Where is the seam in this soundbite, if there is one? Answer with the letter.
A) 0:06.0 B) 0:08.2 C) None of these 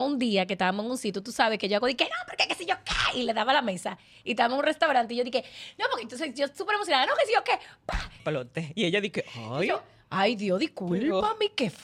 B